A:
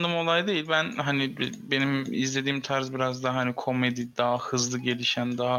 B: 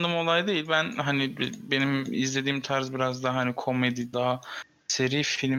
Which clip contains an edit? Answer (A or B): B